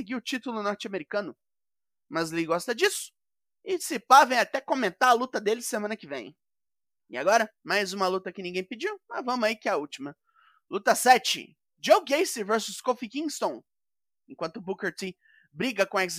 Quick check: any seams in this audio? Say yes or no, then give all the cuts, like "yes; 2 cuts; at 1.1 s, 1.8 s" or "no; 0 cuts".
no; 0 cuts